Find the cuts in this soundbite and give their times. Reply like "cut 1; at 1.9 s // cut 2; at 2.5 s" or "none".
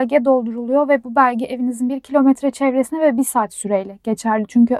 none